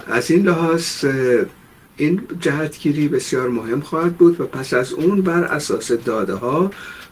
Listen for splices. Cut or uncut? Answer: uncut